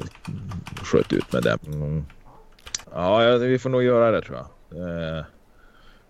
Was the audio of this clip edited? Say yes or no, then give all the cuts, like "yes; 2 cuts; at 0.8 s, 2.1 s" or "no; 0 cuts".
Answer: yes; 2 cuts; at 1.6 s, 2.8 s